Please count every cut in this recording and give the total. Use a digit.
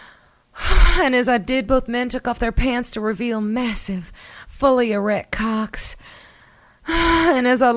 0